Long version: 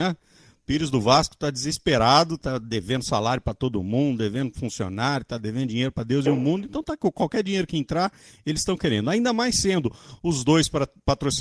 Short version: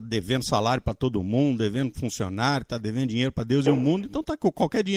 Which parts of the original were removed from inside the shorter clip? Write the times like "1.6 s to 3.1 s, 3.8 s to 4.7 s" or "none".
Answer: none